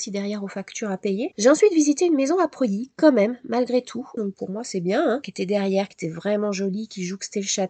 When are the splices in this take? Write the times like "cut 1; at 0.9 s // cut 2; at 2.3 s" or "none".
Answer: cut 1; at 1.3 s // cut 2; at 4.2 s